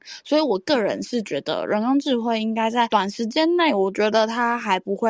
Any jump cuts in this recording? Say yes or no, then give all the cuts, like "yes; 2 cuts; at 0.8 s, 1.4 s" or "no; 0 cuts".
no; 0 cuts